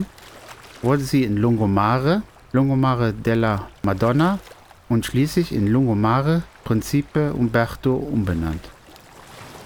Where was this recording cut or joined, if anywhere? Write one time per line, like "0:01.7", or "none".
0:02.4